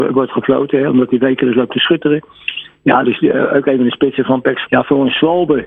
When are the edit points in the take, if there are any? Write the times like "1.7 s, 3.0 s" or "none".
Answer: 3.0 s, 4.7 s